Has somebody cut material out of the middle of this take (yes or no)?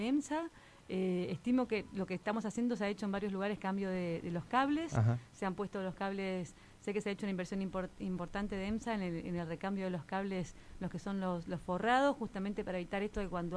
no